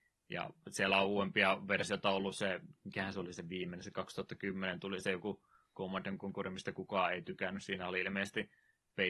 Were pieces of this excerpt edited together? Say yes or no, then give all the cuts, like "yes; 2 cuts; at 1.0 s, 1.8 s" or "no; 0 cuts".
no; 0 cuts